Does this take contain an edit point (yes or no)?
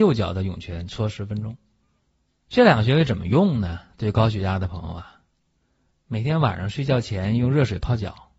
yes